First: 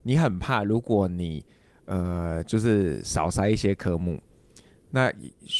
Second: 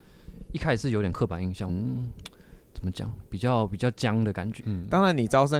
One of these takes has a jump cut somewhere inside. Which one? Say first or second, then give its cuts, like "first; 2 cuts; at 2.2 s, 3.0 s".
second; 2 cuts; at 1.7 s, 4.6 s